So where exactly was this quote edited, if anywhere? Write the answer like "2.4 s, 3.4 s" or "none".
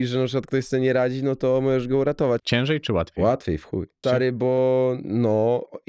2.4 s, 4.0 s

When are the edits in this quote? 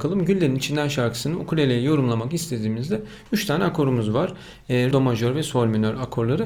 4.9 s

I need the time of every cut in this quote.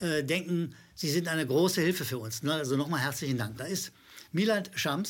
3.6 s

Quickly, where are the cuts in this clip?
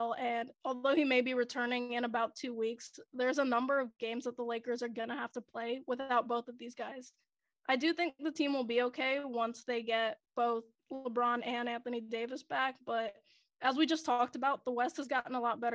none

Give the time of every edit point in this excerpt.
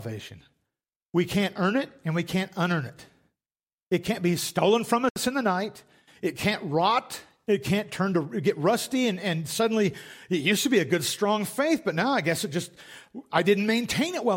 none

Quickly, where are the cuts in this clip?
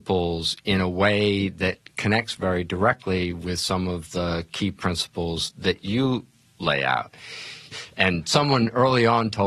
7.7 s

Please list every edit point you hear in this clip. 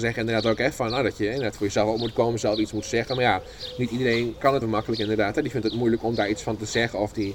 4.6 s

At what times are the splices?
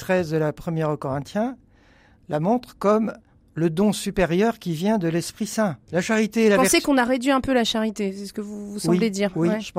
5.9 s

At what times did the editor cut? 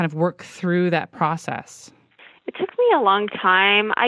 none

